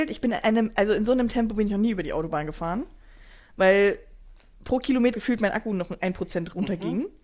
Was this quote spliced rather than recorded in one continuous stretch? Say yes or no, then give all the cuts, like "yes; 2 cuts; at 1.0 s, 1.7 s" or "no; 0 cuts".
yes; 1 cut; at 5.1 s